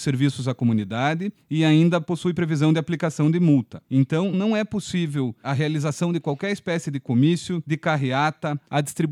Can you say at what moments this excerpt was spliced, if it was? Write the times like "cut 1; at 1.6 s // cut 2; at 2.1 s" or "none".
cut 1; at 4.3 s